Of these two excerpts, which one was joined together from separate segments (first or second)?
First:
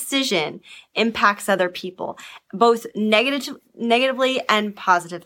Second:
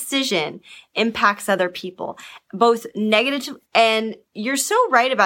second